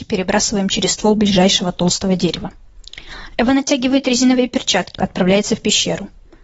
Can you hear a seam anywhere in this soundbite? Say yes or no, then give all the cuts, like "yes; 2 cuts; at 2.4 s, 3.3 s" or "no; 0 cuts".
yes; 1 cut; at 4.9 s